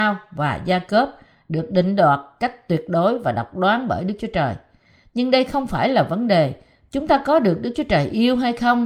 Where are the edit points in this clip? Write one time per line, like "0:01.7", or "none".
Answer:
none